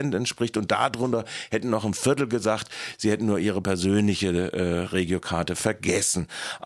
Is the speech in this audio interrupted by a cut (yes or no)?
no